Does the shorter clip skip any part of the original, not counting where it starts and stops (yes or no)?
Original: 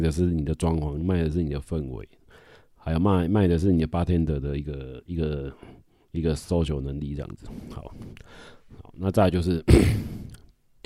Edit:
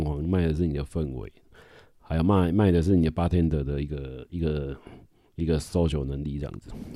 no